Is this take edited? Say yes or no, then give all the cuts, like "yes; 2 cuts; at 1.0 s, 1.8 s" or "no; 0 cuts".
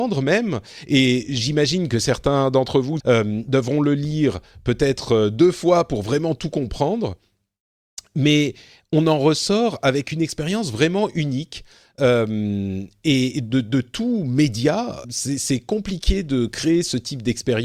yes; 2 cuts; at 3.0 s, 15.0 s